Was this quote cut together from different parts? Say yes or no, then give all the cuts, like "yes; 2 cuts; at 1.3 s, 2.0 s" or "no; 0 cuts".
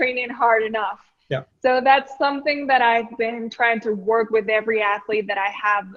no; 0 cuts